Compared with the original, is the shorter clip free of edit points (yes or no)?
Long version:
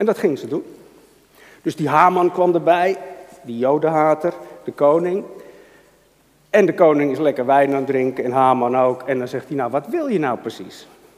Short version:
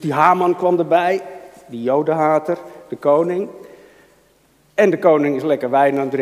yes